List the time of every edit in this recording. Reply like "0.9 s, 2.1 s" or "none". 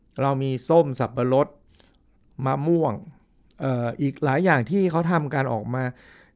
none